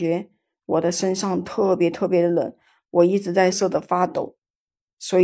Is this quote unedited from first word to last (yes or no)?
no